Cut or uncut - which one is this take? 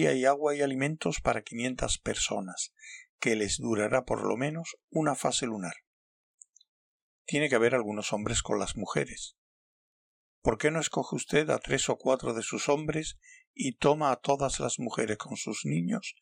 uncut